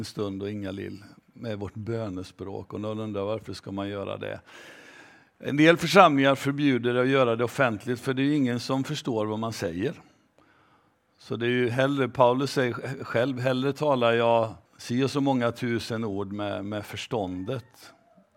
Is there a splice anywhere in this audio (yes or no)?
yes